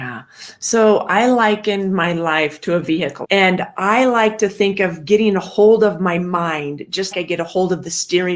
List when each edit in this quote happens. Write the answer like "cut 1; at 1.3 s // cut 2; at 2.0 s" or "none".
cut 1; at 3.2 s // cut 2; at 7.1 s